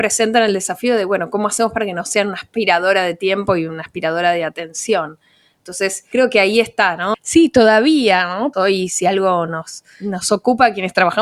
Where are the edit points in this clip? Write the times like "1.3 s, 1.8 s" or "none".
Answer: 7.1 s, 8.5 s